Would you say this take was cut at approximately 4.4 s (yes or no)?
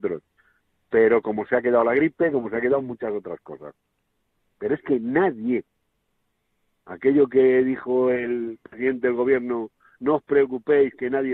yes